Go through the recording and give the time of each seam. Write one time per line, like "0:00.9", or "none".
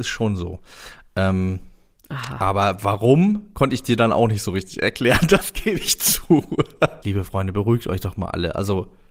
0:07.0

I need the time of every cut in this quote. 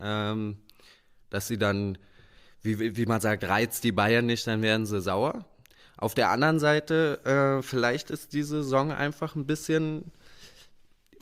none

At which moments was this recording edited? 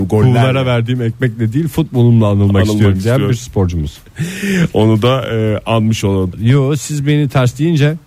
0:06.3

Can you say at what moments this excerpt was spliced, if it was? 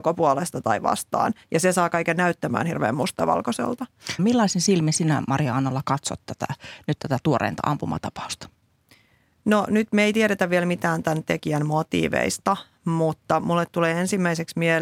0:04.2

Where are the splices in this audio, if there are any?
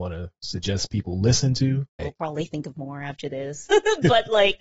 0:02.0
0:03.7

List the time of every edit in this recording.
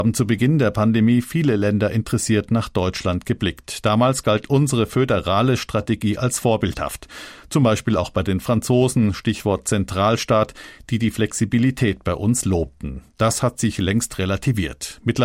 none

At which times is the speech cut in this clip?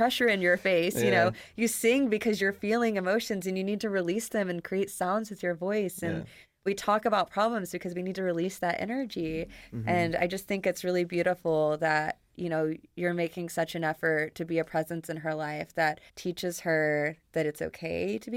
0:16.1

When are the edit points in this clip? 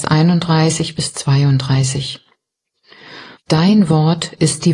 0:03.4

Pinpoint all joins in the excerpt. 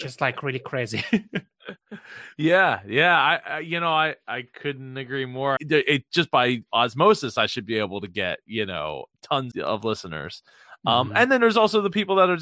0:05.6
0:09.5

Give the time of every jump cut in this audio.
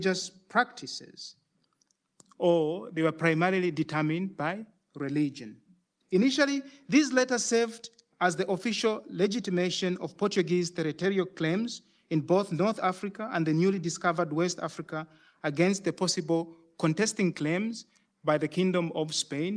0:06.0

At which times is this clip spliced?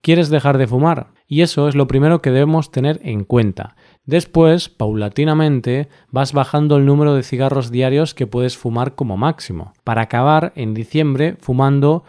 0:01.2
0:04.0
0:09.8

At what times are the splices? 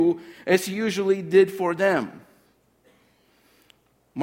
none

